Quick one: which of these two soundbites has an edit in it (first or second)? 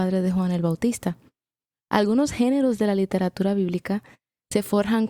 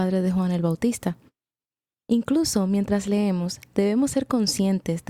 first